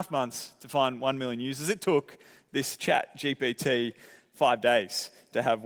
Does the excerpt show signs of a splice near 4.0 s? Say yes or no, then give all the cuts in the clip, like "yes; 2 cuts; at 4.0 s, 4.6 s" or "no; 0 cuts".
no; 0 cuts